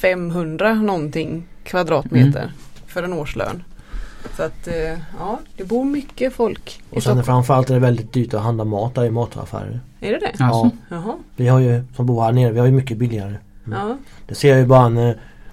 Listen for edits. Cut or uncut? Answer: cut